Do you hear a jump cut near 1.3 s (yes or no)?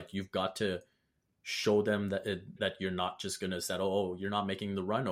no